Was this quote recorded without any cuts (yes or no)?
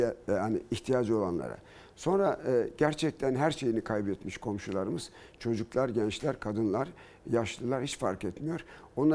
yes